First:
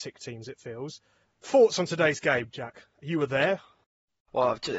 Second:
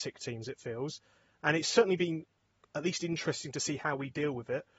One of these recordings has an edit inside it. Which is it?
first; 1 cut; at 1.2 s

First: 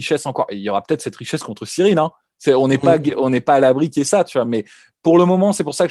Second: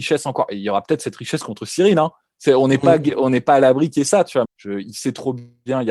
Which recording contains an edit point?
second; 1 cut; at 4.4 s

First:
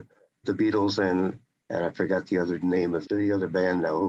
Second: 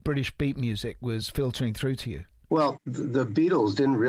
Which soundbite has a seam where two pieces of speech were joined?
first; 1 cut; at 3.0 s

